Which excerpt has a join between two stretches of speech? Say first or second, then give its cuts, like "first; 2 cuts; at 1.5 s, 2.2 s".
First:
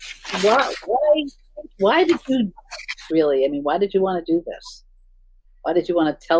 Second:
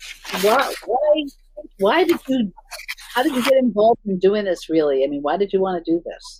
first; 1 cut; at 3.1 s